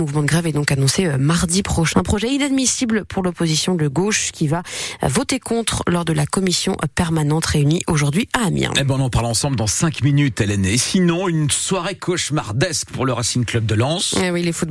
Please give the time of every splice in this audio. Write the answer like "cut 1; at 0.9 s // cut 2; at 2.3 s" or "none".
cut 1; at 1.9 s